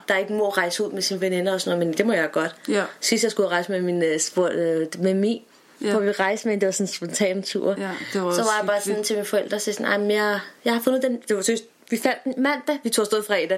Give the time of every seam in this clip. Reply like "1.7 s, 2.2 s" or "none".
none